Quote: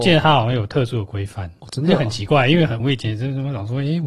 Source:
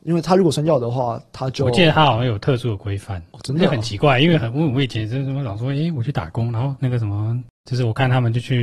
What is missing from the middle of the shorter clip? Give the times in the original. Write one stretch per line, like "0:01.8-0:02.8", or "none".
0:04.5-0:04.7